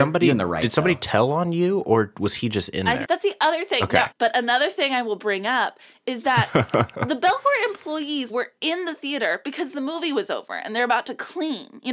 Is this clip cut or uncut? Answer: cut